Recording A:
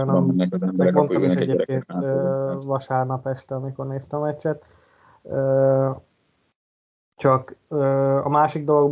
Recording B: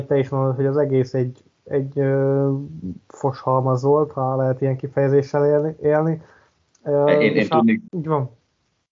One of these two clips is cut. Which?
B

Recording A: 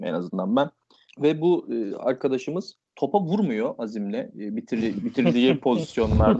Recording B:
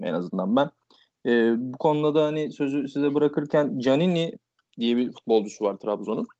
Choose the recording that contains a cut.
A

